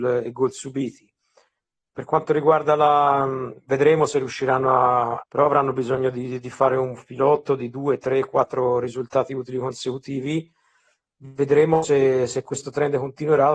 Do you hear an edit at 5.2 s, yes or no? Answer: yes